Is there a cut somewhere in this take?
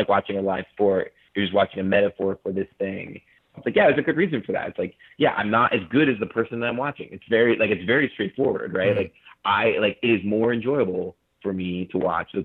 yes; 1 cut; at 3.5 s

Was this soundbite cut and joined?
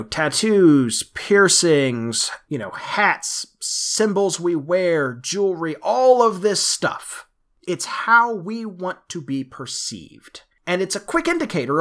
no; 0 cuts

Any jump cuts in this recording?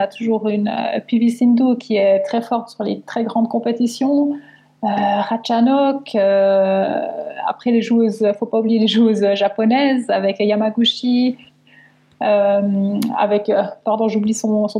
no; 0 cuts

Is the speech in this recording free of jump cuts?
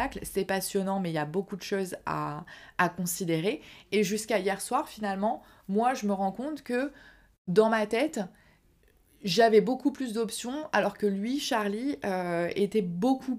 yes; 0 cuts

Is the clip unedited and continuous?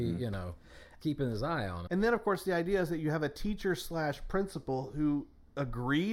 no; 1 cut; at 1.9 s

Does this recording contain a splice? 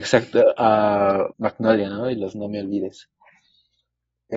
yes; 1 cut; at 1.3 s

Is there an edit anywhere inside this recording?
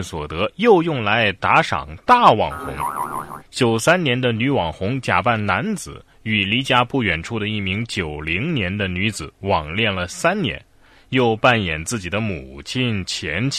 yes; 1 cut; at 3.4 s

